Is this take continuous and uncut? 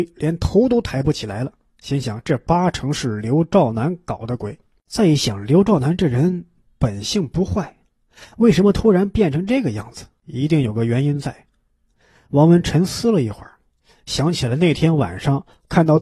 yes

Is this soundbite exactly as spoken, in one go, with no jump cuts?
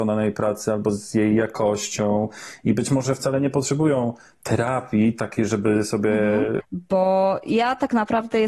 no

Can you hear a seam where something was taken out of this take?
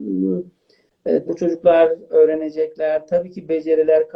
yes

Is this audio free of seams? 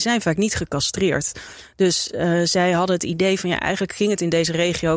yes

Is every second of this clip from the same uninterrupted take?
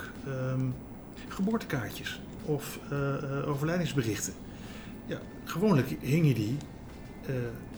yes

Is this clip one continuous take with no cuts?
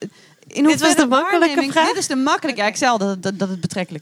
yes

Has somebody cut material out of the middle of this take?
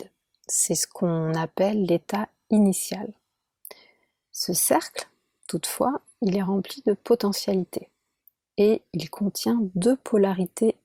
no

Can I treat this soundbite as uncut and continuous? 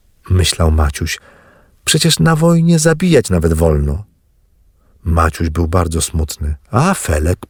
yes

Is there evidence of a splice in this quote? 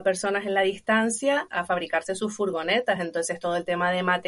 no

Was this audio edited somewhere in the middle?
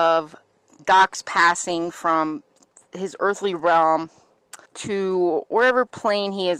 yes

